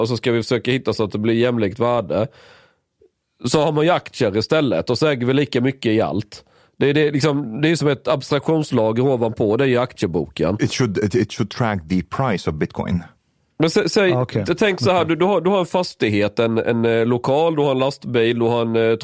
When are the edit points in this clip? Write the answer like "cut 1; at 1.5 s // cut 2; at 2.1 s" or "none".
cut 1; at 10.6 s